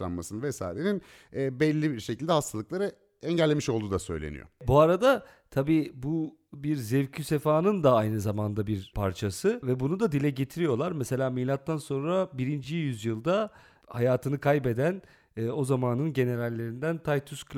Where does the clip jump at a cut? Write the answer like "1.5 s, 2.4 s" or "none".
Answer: none